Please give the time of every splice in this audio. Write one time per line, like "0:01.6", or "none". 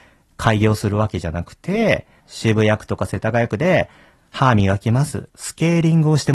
0:02.2
0:05.3

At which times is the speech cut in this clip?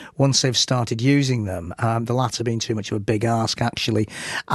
none

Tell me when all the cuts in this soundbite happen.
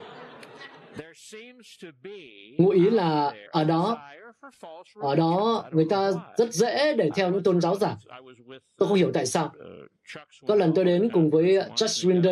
0:03.5

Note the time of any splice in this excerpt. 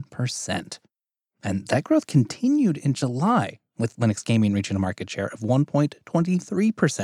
none

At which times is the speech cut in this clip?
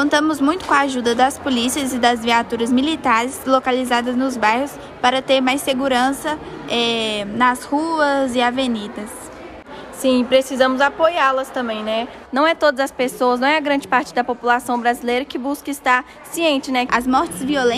0:12.2
0:16.9

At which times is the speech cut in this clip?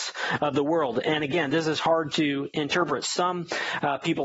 none

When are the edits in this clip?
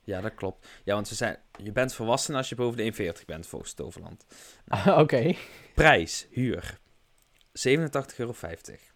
none

